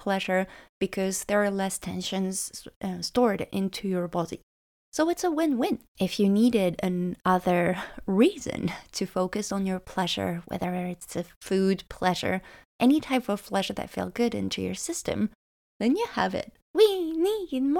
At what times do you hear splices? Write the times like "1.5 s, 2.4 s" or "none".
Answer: 5.9 s, 10.4 s, 16.6 s